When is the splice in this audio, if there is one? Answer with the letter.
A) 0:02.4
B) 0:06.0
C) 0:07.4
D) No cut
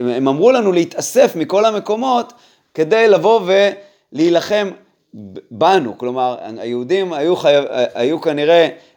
D